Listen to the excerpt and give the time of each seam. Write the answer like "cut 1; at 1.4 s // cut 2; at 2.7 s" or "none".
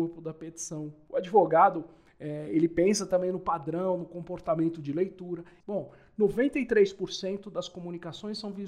cut 1; at 5.6 s